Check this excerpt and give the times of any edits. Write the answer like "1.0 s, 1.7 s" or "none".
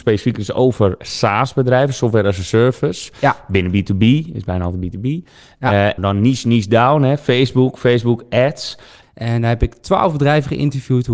6.0 s, 9.0 s